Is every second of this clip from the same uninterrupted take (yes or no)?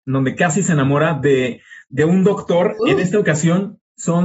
no